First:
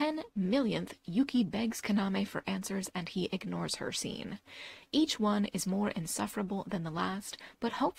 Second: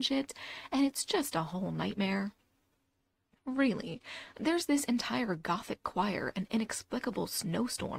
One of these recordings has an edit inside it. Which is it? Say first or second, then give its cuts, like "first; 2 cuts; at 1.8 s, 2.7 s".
second; 1 cut; at 4.3 s